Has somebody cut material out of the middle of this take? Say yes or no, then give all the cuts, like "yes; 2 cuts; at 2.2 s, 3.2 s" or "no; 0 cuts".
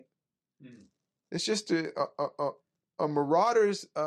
no; 0 cuts